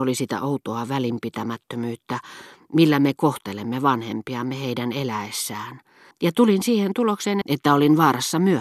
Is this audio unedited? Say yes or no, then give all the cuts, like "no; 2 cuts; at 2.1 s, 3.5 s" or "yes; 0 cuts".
no; 2 cuts; at 6.1 s, 7.4 s